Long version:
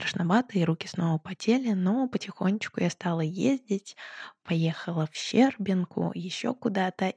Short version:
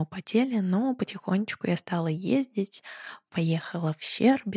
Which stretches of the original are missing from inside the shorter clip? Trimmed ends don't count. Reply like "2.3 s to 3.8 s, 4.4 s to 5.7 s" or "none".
none